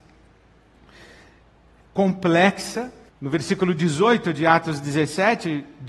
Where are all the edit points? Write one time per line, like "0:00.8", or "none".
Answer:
0:03.1